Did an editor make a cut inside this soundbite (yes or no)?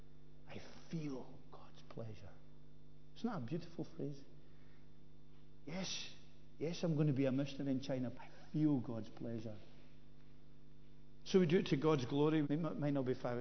yes